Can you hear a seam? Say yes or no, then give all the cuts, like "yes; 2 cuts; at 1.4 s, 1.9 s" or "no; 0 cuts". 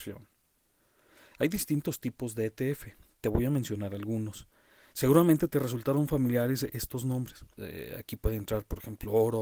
yes; 2 cuts; at 4.9 s, 7.6 s